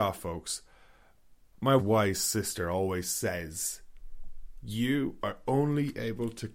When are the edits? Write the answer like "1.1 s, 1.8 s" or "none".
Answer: 1.8 s